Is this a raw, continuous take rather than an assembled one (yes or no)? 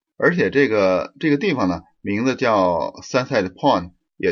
yes